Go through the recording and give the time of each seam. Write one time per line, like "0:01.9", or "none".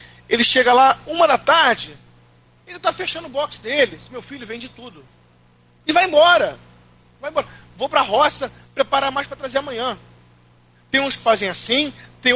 none